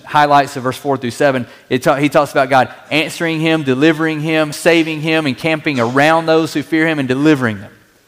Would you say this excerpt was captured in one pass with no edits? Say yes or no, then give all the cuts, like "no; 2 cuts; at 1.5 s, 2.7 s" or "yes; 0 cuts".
no; 1 cut; at 4.5 s